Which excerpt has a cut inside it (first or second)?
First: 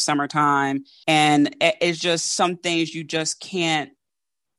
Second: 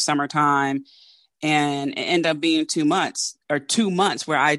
first